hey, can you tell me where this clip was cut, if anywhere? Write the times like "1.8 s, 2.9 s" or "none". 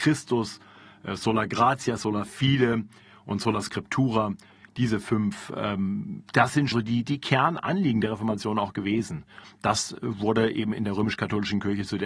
6.7 s, 9.4 s